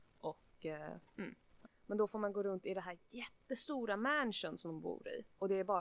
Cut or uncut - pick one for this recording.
cut